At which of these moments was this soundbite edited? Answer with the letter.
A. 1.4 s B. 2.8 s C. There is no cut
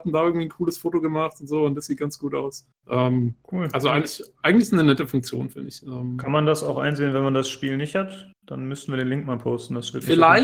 B